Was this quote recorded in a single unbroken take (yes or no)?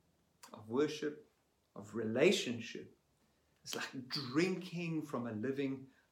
no